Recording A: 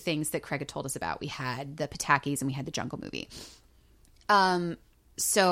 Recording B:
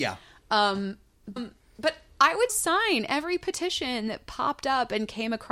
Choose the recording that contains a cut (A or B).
B